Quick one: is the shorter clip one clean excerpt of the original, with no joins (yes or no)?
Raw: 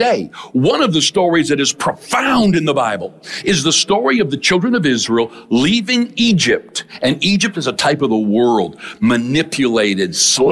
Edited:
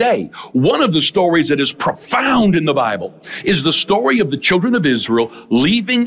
yes